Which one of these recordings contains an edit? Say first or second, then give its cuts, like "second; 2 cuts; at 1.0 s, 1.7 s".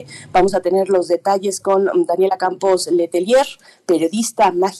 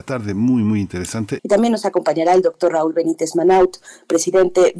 second; 1 cut; at 1.4 s